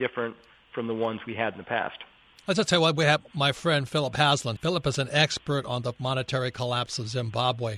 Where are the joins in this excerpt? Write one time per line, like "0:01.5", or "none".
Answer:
0:02.4
0:04.6